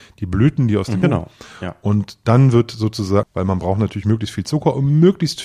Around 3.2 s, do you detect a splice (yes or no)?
yes